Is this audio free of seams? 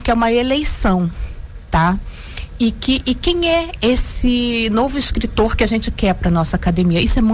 yes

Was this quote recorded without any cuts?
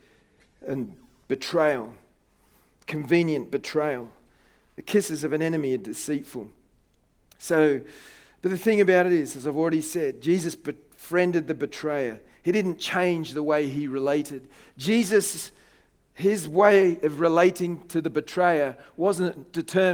yes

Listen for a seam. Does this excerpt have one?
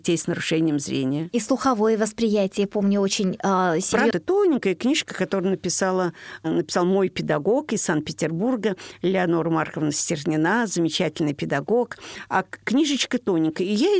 yes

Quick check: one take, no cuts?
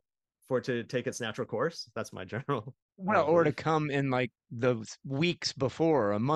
yes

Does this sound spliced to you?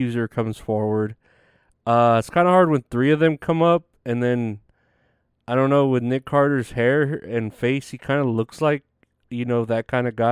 no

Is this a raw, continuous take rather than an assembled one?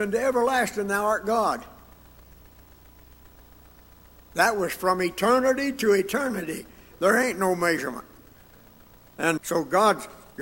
no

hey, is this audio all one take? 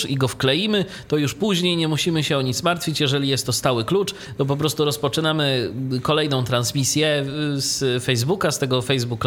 yes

